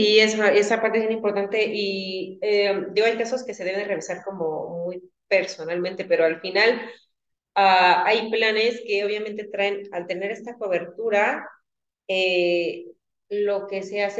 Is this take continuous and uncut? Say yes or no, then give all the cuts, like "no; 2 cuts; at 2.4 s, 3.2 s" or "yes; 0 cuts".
yes; 0 cuts